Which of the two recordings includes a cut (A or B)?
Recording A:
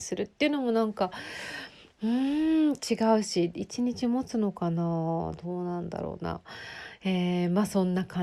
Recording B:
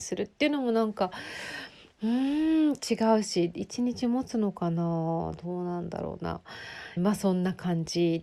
B